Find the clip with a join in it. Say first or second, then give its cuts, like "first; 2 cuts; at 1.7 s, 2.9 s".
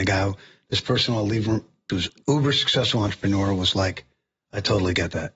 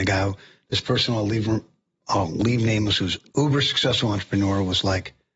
first; 1 cut; at 1.9 s